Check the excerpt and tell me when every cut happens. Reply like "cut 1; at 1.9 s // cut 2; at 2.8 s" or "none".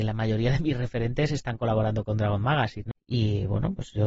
cut 1; at 2.9 s